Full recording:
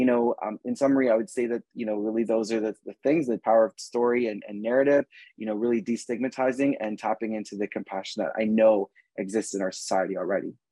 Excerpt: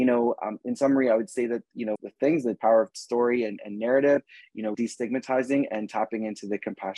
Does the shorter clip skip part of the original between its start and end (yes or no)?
yes